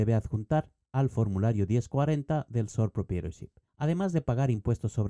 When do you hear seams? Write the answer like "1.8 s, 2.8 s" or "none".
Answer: 3.7 s